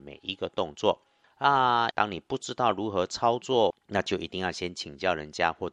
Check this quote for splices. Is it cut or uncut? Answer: cut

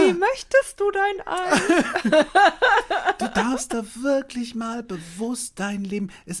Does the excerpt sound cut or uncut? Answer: uncut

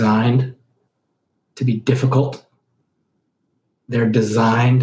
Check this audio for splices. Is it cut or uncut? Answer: uncut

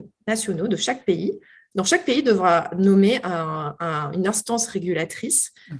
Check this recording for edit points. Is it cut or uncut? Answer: uncut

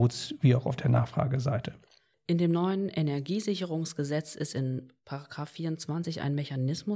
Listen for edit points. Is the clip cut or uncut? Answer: cut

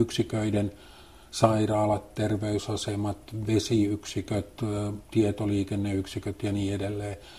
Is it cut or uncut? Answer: uncut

